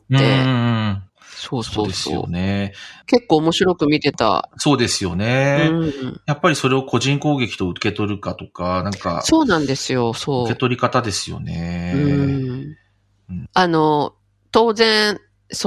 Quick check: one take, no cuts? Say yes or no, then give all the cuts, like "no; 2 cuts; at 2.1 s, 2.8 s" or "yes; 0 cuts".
no; 1 cut; at 1.1 s